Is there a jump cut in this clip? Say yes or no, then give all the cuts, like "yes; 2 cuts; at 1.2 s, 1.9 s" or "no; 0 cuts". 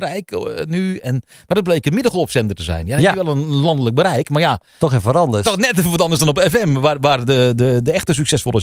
no; 0 cuts